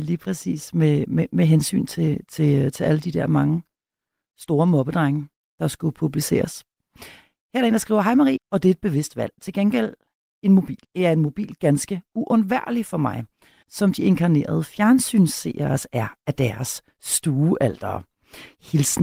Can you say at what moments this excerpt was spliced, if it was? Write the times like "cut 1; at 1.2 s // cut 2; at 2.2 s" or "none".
cut 1; at 8.4 s // cut 2; at 10.8 s // cut 3; at 13.6 s

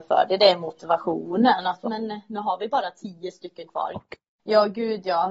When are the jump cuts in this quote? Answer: cut 1; at 1.8 s // cut 2; at 3.9 s

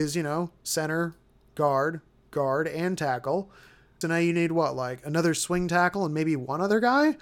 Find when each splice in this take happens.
cut 1; at 4.0 s

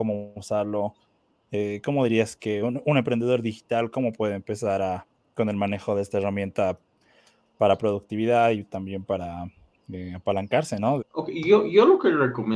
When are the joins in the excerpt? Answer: cut 1; at 11.0 s

